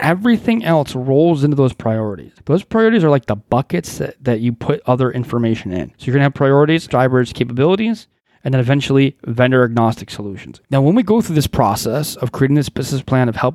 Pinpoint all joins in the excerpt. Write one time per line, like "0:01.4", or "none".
0:06.9
0:10.6